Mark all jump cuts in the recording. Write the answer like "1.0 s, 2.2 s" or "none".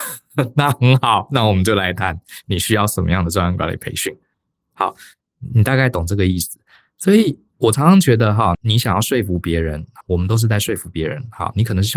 8.5 s, 10.0 s